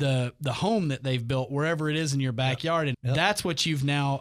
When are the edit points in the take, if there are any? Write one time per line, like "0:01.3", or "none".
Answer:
0:02.9